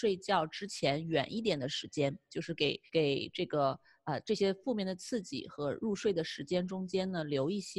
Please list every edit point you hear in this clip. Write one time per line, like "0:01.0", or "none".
0:02.9